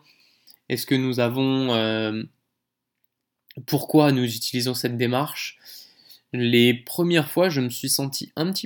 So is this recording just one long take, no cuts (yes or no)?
yes